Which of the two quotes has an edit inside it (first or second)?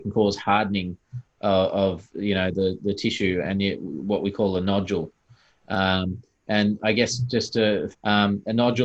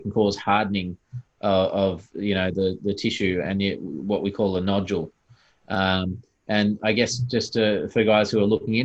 first